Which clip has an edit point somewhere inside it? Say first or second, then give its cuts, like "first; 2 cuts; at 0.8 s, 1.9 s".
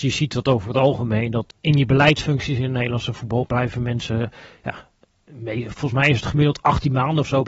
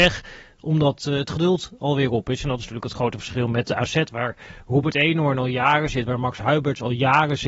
first; 1 cut; at 1.5 s